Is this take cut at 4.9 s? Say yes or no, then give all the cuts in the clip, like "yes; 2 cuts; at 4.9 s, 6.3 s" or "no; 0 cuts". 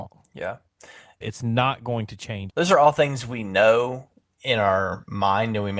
no; 2 cuts; at 1.2 s, 2.5 s